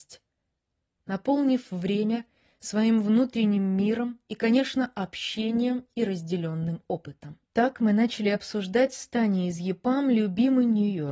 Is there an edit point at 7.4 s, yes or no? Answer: yes